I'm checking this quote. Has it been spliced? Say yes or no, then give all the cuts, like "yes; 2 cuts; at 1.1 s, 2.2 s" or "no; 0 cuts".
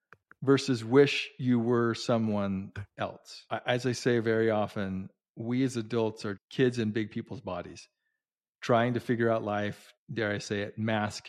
yes; 2 cuts; at 6.4 s, 10.0 s